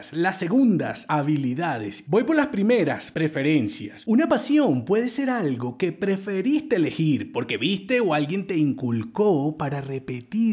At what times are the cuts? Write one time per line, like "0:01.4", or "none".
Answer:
0:02.1